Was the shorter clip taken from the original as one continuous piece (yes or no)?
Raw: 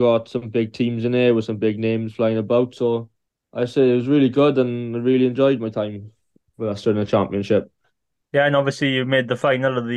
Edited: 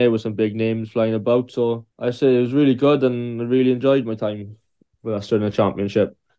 no